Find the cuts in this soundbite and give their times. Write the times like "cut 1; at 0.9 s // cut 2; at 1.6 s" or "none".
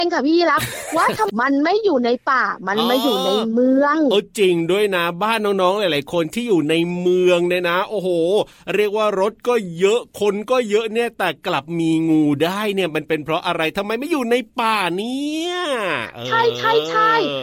cut 1; at 1.3 s